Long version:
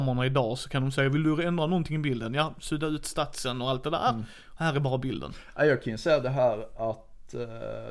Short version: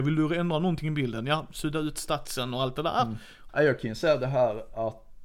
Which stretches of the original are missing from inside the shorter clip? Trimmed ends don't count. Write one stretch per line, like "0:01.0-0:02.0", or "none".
0:04.6-0:05.5

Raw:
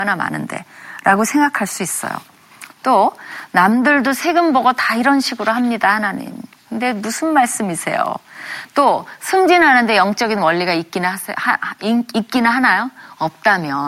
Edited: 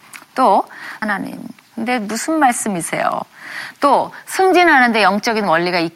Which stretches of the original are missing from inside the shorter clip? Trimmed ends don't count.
0:03.5-0:06.0

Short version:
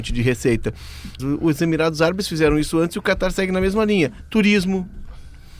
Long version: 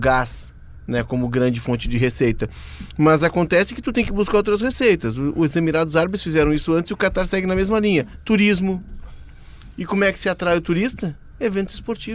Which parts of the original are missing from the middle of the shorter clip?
0:03.0-0:05.1

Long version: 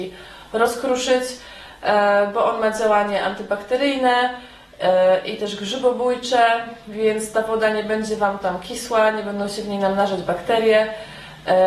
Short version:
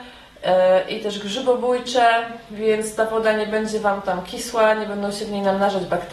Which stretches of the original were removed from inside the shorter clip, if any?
none

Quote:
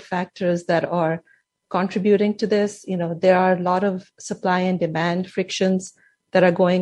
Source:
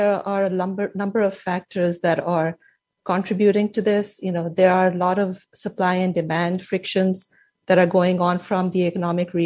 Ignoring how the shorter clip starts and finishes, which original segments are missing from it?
none

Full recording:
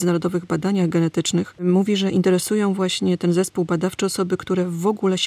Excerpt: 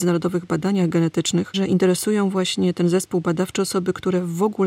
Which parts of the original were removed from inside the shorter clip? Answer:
0:01.5-0:02.0

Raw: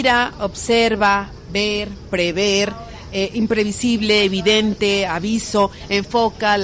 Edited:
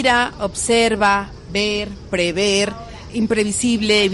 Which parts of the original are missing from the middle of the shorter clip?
0:03.1-0:03.3

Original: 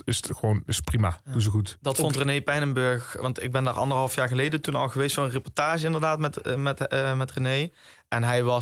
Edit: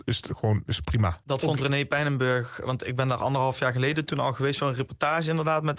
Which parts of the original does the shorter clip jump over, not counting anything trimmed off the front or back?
0:01.2-0:01.8

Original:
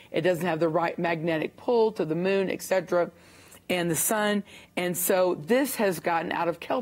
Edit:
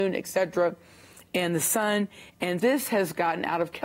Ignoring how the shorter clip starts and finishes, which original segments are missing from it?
0:05.0-0:05.5

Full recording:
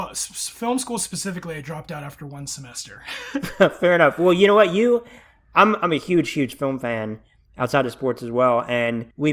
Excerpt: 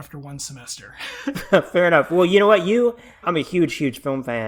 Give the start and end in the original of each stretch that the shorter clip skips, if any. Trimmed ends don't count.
0:05.3-0:05.8

